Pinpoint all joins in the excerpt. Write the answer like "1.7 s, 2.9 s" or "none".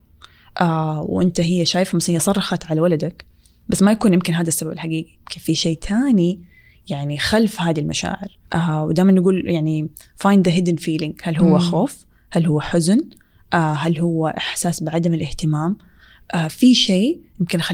8.4 s